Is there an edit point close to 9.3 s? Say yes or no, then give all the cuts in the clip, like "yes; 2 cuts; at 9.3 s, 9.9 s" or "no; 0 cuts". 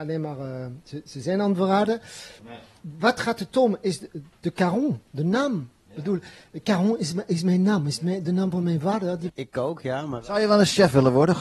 yes; 2 cuts; at 2.4 s, 9.3 s